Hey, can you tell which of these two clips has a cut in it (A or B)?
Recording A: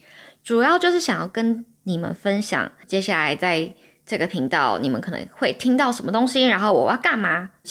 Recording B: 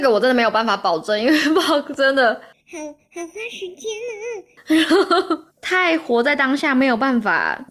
B